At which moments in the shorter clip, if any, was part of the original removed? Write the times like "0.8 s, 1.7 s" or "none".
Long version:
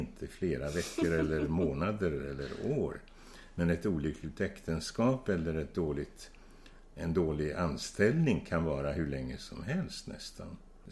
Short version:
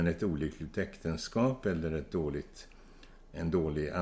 none

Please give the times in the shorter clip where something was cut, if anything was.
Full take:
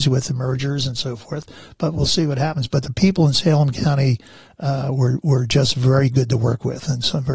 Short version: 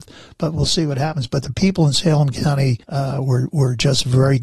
2.8 s

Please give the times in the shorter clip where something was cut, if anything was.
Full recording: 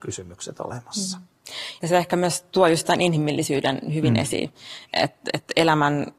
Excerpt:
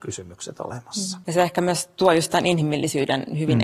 1.2 s

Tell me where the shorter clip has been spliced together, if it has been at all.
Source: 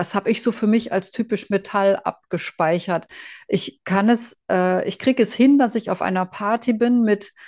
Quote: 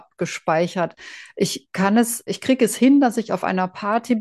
2.3 s

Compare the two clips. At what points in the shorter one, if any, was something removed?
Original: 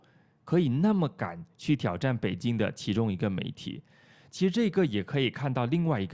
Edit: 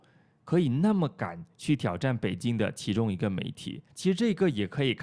3.9 s

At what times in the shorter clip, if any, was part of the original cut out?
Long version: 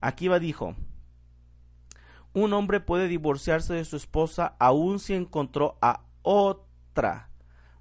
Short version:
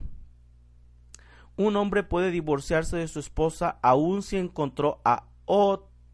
none

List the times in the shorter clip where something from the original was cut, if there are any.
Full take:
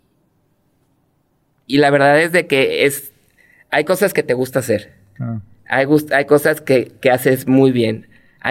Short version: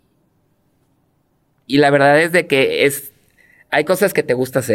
none

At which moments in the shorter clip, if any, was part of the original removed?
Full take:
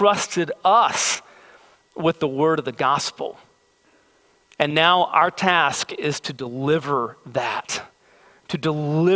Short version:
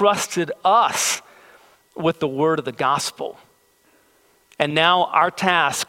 none

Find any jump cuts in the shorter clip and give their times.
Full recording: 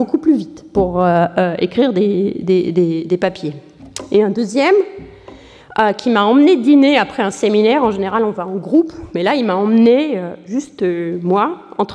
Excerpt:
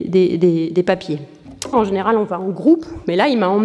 1.7 s

